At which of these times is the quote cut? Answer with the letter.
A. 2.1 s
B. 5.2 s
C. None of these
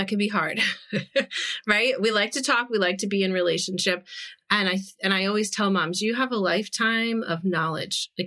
C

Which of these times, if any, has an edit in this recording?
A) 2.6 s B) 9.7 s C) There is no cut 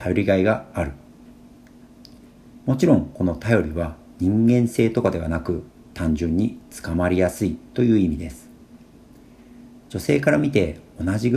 A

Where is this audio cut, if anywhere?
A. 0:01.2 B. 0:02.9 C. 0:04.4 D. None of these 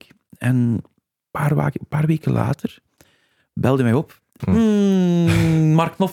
C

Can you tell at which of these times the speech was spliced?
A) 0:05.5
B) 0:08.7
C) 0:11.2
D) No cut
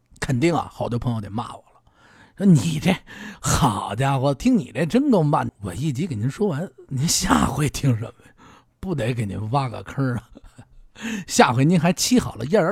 A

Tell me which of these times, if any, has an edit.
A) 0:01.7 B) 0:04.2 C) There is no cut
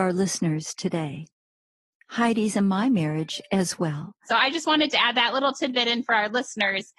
B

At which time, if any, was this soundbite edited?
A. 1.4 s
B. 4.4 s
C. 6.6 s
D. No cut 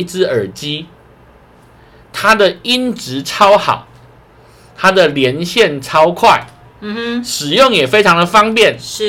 D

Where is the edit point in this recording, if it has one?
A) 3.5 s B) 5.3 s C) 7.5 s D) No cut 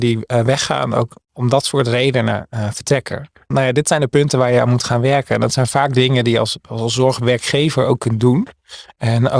A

